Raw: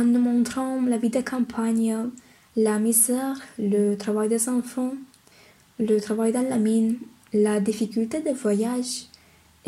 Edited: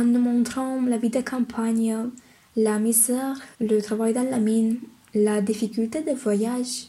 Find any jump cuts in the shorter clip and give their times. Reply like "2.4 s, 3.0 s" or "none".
3.5 s